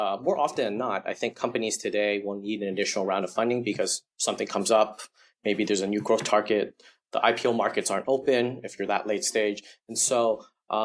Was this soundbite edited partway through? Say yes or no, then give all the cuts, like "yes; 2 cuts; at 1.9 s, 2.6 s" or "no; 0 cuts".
no; 0 cuts